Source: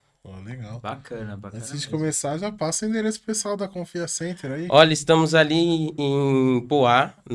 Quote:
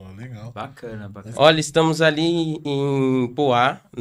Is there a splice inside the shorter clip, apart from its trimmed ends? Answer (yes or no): yes